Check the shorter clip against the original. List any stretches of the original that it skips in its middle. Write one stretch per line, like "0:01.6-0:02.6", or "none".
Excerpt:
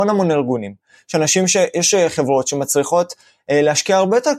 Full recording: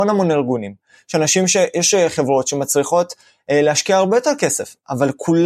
none